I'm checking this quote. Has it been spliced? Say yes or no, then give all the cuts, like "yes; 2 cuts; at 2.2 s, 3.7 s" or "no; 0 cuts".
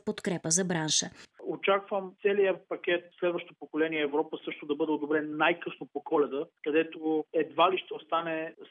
yes; 1 cut; at 1.3 s